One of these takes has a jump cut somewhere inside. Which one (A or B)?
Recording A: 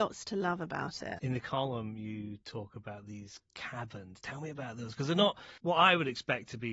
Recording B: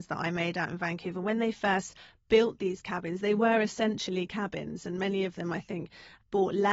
A